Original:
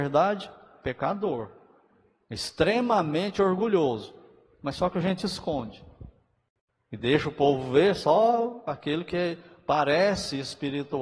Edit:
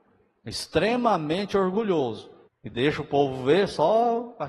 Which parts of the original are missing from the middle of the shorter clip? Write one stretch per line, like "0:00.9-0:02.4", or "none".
0:04.3-0:06.7